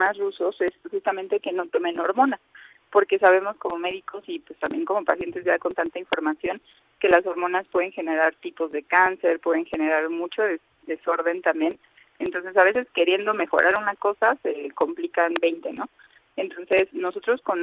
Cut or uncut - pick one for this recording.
uncut